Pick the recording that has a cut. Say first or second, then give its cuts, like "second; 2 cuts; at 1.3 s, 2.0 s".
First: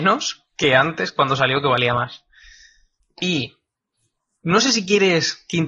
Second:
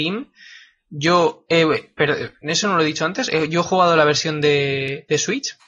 first; 1 cut; at 3.0 s